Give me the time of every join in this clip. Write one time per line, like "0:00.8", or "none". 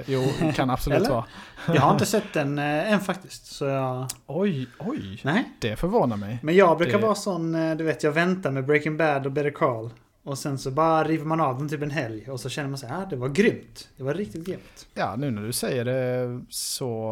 0:14.9

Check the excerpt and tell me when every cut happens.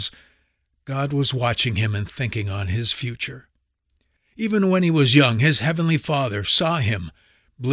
0:04.2

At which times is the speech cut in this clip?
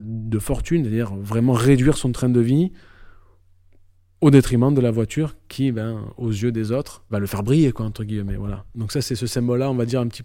none

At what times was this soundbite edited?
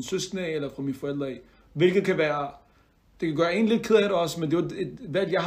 none

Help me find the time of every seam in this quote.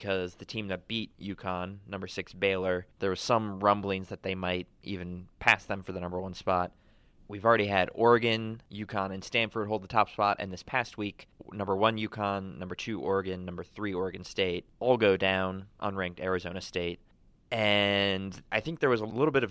0:07.2
0:15.7

